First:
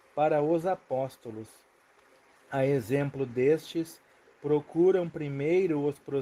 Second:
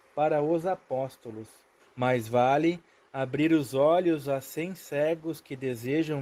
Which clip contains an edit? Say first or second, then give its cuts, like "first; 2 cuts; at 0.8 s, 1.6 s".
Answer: second; 1 cut; at 1.8 s